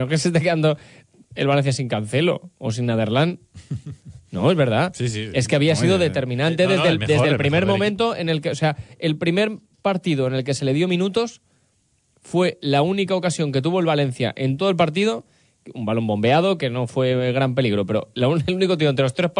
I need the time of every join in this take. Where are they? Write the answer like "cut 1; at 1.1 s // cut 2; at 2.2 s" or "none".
none